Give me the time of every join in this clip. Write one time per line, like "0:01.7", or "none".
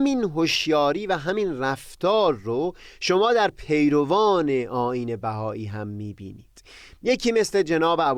none